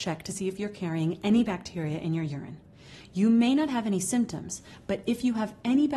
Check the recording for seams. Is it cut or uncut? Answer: uncut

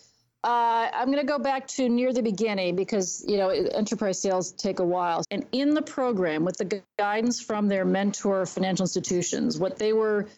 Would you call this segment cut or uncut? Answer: cut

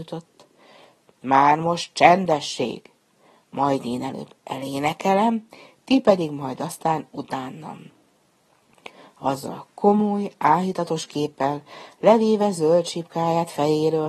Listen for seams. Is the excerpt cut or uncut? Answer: uncut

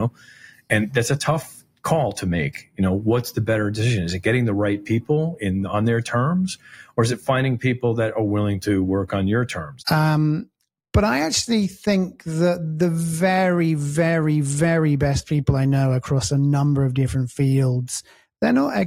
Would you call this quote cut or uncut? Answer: cut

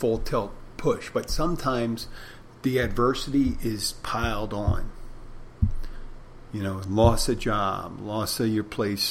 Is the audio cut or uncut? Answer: uncut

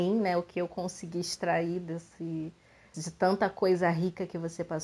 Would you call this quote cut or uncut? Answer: cut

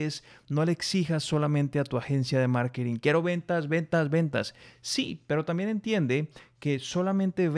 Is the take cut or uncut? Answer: uncut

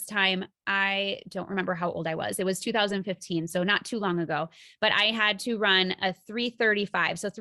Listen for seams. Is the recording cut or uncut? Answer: uncut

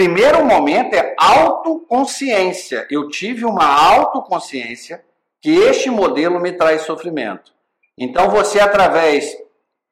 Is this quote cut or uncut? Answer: uncut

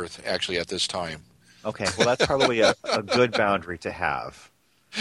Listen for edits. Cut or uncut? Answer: uncut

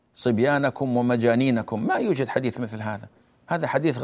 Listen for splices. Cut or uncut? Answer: uncut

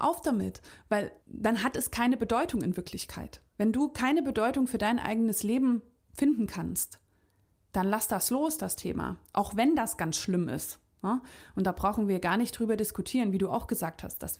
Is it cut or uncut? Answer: cut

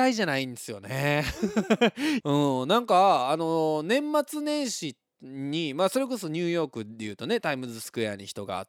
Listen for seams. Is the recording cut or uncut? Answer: cut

